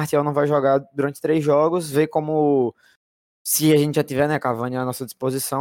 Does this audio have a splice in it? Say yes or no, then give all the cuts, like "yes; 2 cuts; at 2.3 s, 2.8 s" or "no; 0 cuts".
no; 0 cuts